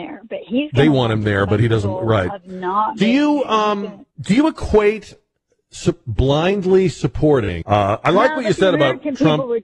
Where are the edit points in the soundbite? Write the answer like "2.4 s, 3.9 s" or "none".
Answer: 4.1 s, 7.6 s